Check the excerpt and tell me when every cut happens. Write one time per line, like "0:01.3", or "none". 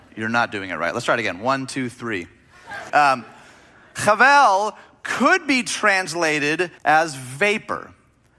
0:02.9
0:06.8